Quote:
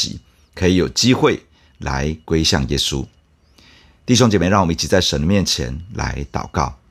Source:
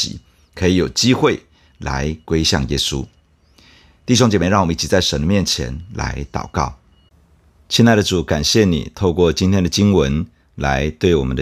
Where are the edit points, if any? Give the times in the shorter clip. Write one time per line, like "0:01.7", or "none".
none